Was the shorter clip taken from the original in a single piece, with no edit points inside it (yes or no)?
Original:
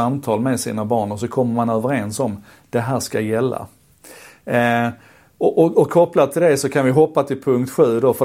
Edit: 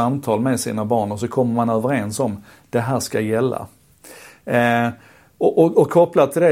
yes